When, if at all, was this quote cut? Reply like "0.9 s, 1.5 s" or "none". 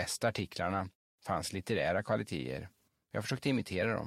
1.1 s